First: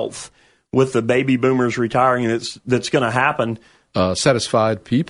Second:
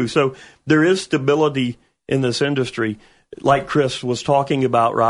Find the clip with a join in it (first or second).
first